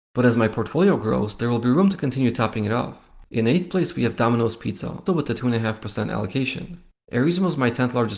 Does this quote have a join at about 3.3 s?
no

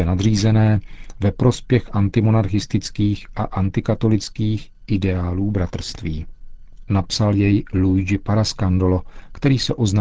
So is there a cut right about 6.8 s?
yes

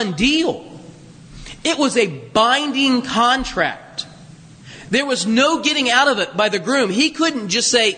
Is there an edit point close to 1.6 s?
no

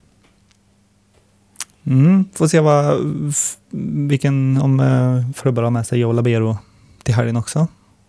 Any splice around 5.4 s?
yes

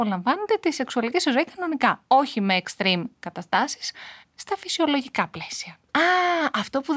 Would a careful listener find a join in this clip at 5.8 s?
no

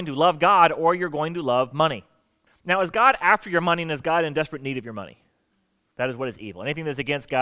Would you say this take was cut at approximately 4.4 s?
no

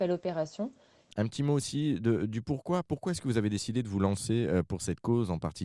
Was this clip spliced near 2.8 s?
no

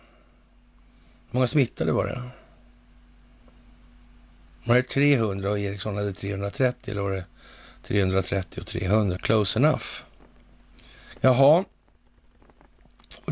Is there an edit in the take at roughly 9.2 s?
yes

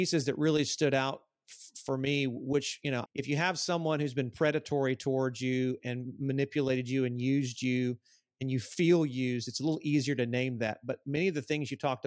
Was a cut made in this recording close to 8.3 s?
no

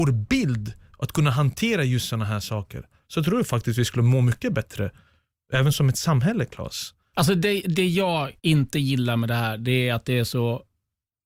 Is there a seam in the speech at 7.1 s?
yes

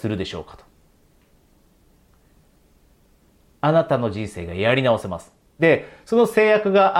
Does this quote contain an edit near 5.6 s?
yes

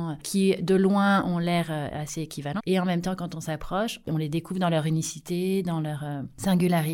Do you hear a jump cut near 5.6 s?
no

